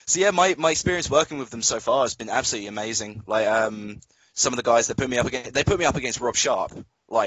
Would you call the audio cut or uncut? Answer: uncut